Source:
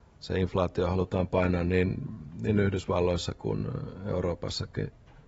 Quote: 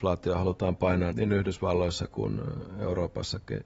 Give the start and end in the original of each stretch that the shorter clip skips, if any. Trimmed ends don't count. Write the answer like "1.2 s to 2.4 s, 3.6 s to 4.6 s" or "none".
1.6 s to 2.4 s